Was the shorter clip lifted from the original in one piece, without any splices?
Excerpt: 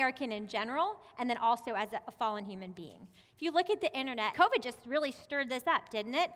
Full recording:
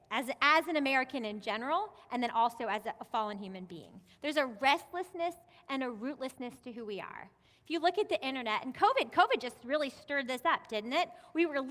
no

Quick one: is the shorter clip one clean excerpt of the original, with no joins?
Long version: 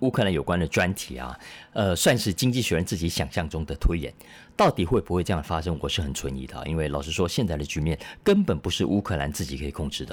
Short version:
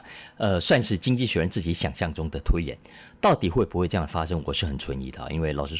yes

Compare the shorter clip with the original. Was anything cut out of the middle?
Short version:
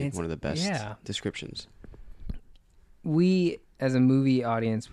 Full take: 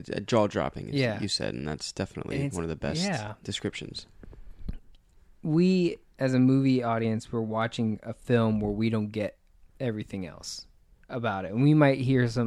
no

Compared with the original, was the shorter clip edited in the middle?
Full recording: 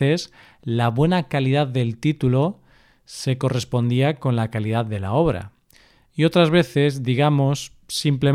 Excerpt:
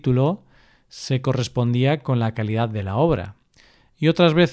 no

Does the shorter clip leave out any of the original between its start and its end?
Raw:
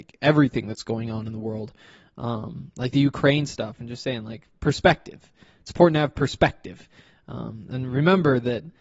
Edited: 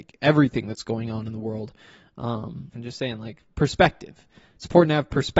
yes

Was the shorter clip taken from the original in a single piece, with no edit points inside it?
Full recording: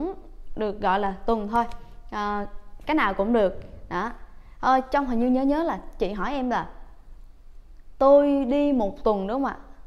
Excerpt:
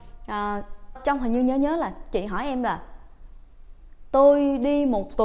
no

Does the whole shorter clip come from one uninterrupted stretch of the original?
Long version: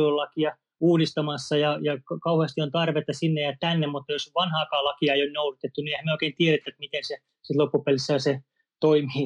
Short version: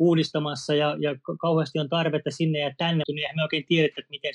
no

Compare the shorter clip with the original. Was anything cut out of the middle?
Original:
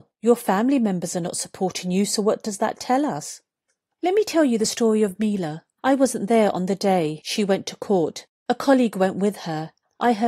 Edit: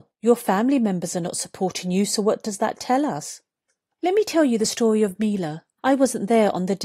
no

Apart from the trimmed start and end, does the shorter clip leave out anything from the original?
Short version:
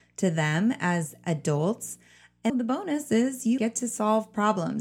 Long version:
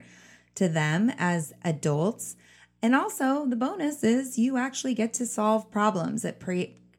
yes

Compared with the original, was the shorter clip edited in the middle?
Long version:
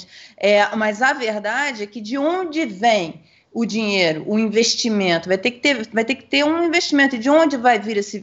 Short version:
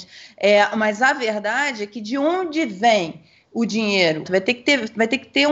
yes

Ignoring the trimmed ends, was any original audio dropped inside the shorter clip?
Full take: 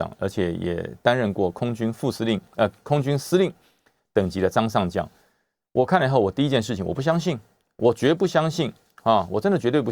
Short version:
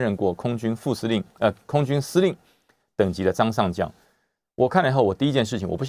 no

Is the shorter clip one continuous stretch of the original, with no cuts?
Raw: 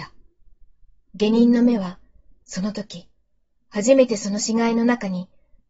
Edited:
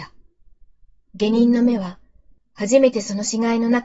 no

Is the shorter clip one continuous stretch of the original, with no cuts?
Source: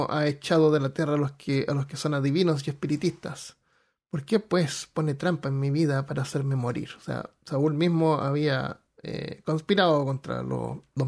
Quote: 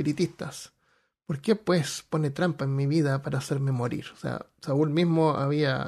yes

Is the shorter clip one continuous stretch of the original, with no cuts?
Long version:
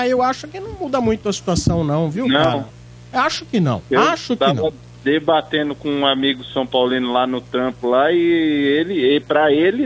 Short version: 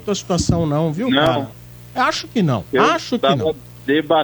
yes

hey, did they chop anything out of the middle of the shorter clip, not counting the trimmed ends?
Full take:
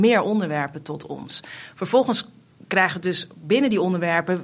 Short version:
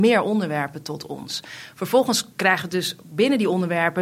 yes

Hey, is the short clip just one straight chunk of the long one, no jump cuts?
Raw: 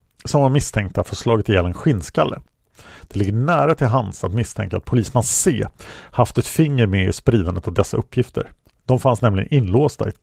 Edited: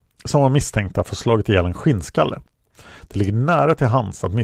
yes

